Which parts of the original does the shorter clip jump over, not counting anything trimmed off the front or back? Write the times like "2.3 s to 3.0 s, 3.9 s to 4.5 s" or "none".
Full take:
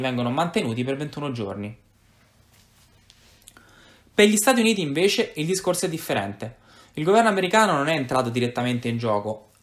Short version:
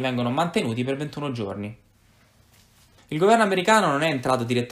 3.0 s to 6.8 s